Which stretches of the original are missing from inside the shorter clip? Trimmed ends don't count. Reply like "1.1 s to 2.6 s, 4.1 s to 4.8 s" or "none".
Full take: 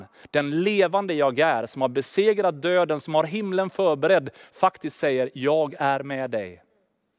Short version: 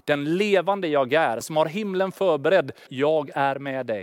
1.7 s to 3.0 s, 4.4 s to 5.3 s